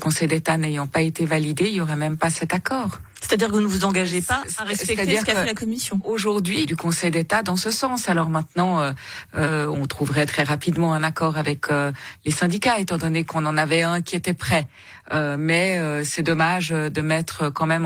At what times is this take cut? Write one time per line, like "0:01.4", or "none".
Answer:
0:06.6